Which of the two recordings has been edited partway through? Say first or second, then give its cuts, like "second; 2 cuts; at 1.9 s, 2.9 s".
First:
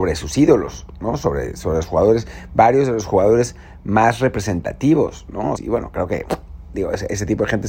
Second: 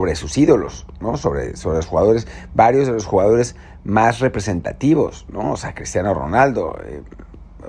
first; 1 cut; at 5.6 s